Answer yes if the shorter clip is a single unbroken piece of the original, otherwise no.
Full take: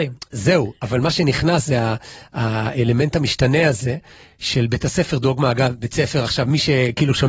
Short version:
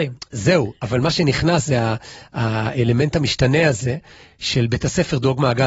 yes